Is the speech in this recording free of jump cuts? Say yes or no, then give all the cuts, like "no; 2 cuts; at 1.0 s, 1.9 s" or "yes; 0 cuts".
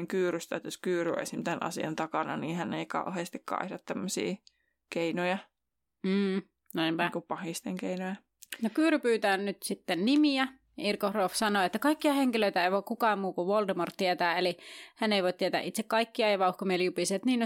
yes; 0 cuts